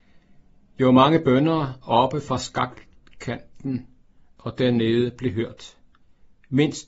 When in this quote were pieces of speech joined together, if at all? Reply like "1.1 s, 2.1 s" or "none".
none